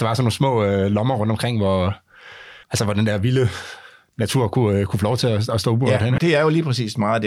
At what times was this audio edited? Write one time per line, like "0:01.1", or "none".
0:02.6
0:06.2